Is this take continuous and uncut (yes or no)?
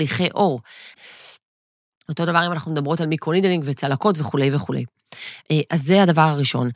no